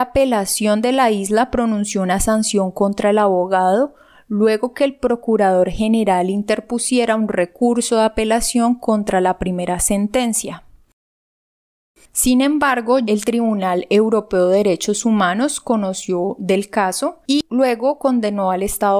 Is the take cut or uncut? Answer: uncut